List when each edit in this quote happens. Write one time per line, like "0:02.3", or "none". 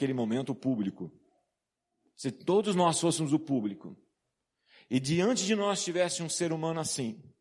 none